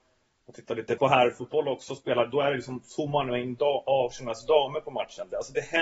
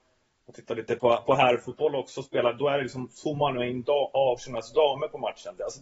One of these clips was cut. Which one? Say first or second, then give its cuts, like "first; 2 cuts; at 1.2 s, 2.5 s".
first; 1 cut; at 1.0 s